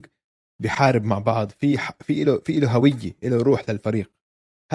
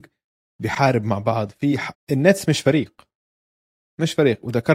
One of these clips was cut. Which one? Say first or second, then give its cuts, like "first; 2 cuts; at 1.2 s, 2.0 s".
second; 1 cut; at 1.9 s